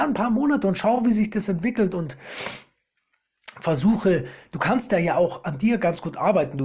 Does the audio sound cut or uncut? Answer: uncut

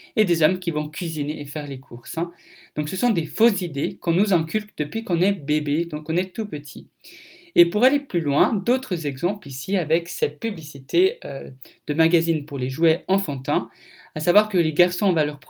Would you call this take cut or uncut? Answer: uncut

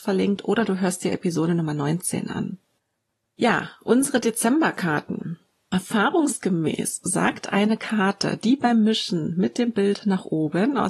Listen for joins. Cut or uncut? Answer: uncut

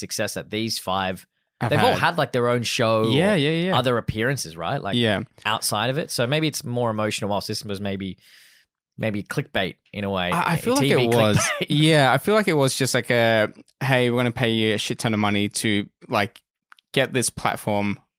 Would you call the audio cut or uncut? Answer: uncut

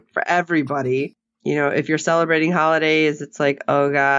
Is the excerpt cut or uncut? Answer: uncut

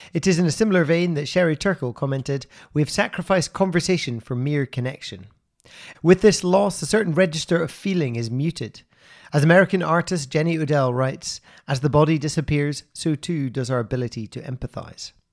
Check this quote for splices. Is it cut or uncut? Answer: cut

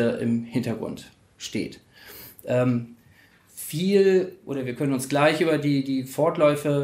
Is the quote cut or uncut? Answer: uncut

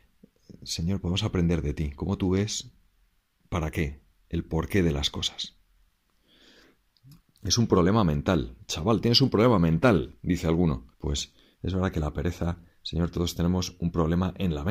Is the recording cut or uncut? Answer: cut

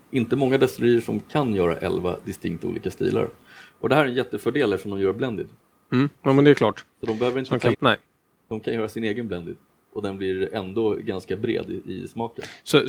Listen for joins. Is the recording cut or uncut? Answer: cut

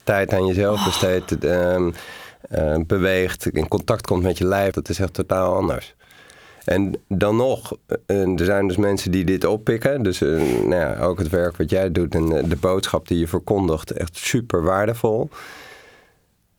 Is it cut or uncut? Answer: cut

